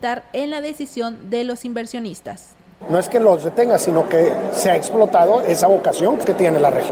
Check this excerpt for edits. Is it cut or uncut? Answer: uncut